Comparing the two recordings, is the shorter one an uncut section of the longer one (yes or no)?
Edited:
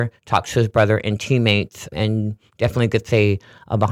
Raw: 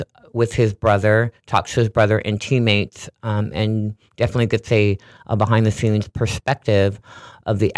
no